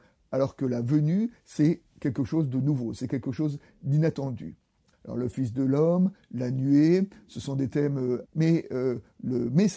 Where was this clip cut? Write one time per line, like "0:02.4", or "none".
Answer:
0:04.9
0:08.3